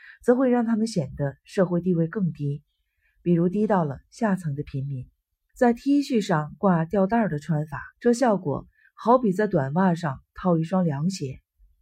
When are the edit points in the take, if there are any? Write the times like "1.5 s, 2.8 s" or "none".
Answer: 5.5 s, 7.9 s